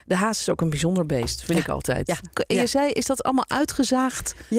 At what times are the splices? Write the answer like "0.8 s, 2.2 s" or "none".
2.3 s